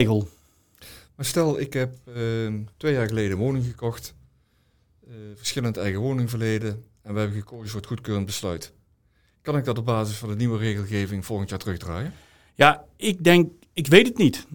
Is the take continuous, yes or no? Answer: no